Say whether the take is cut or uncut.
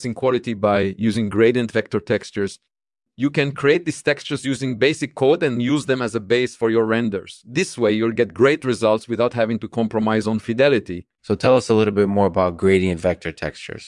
cut